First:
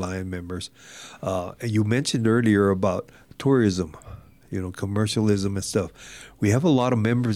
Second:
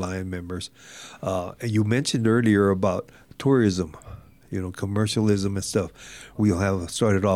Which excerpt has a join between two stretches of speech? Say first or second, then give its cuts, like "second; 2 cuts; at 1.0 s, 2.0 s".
second; 1 cut; at 6.4 s